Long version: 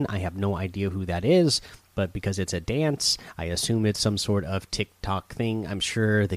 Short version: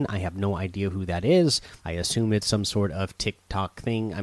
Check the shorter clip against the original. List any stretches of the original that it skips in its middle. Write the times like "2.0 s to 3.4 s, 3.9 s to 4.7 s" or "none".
1.8 s to 3.3 s